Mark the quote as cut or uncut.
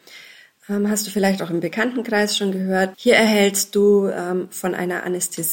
cut